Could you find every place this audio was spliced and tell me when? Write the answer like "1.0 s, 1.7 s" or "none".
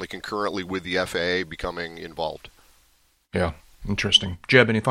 3.8 s